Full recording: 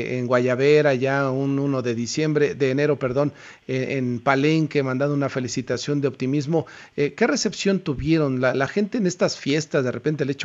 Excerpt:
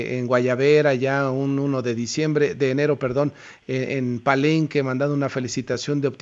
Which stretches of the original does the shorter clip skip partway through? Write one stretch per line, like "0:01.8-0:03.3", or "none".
none